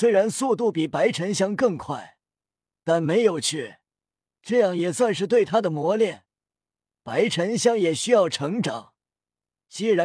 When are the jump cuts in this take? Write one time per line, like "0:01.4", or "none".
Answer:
none